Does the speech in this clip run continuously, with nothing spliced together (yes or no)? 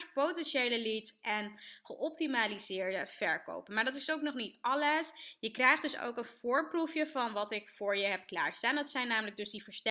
yes